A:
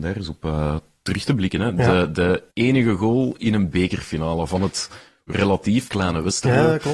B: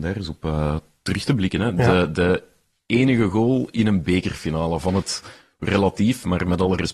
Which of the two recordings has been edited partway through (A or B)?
A